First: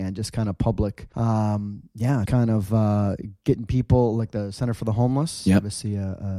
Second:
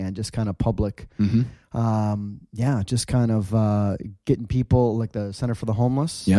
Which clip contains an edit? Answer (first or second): first